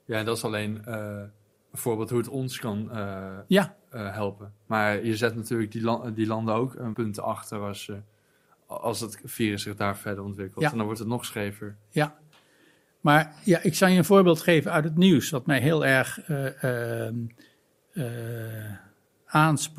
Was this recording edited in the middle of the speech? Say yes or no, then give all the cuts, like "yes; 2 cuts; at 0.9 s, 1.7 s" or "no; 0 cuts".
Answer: yes; 1 cut; at 6.9 s